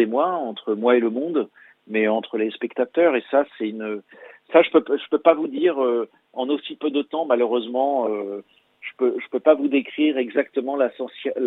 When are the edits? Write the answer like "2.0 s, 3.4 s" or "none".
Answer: none